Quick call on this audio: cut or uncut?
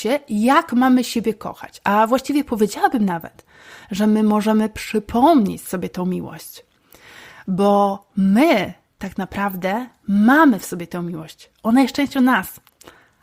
uncut